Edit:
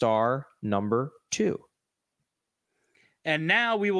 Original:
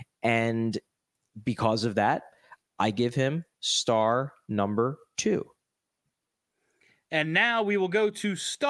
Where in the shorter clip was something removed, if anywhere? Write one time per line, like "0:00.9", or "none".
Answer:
none